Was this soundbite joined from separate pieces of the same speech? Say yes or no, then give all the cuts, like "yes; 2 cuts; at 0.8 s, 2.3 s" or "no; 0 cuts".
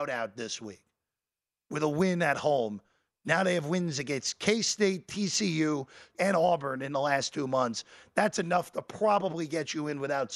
yes; 1 cut; at 6.1 s